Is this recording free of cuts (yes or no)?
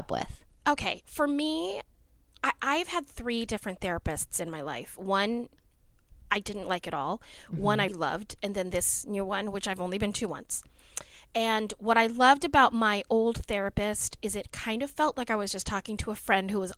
no